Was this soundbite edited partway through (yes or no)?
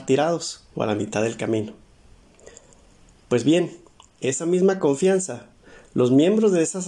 no